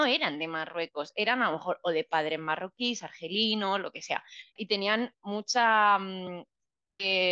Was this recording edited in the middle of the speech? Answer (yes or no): yes